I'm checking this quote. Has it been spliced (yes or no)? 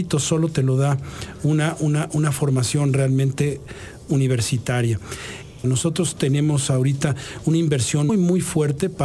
yes